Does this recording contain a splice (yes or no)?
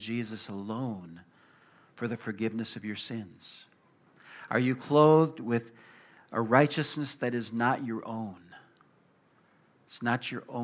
no